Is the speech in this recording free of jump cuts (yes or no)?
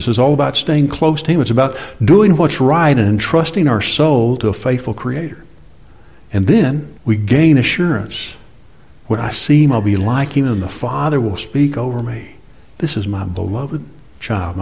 no